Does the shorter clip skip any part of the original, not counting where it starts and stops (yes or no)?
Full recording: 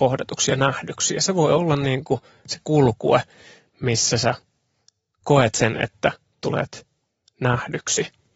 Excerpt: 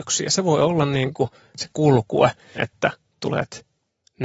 yes